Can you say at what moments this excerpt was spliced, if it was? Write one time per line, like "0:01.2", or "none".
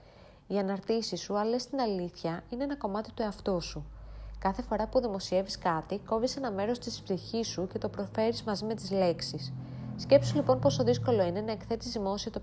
none